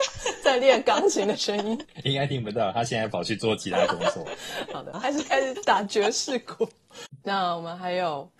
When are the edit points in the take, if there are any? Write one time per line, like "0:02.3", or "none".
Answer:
0:04.9
0:07.2